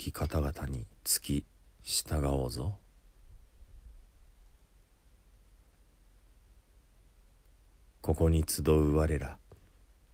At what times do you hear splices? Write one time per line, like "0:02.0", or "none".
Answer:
0:01.0